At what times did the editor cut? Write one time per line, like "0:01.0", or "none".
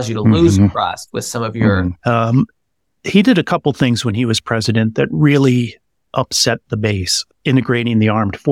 0:02.0
0:07.3